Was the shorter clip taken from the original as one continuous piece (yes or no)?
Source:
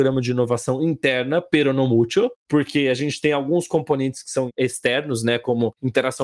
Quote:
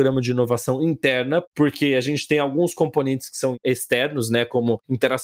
no